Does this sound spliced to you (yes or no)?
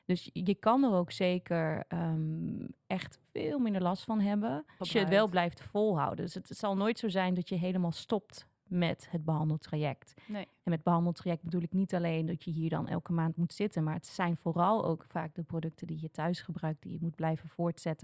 yes